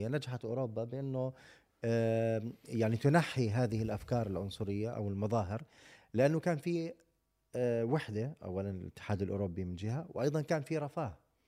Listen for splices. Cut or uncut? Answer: uncut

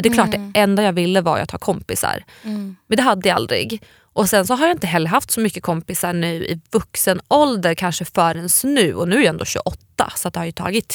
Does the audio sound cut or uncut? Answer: uncut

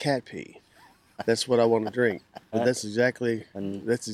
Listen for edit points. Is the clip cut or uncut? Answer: cut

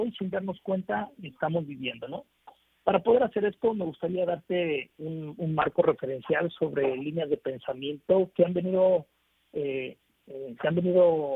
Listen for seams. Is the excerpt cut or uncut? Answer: cut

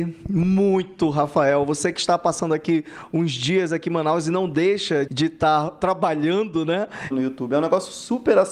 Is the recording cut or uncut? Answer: cut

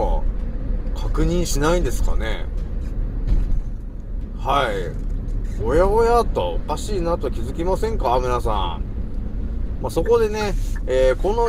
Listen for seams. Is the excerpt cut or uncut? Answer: cut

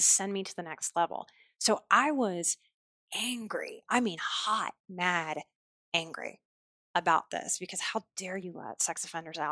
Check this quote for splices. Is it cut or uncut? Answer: uncut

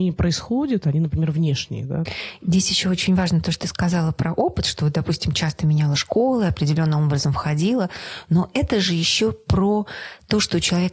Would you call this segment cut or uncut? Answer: uncut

